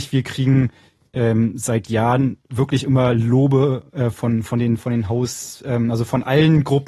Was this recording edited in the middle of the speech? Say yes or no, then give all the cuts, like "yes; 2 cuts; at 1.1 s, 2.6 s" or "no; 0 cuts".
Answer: no; 0 cuts